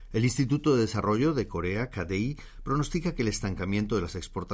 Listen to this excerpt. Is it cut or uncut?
uncut